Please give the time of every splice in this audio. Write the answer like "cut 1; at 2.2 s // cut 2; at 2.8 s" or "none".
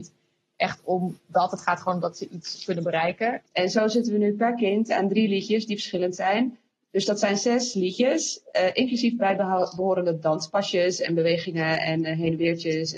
cut 1; at 3.5 s